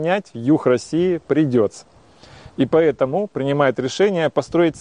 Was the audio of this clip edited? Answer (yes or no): no